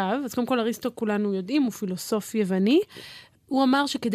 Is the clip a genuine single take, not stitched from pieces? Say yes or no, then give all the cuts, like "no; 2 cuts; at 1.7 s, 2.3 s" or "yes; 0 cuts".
yes; 0 cuts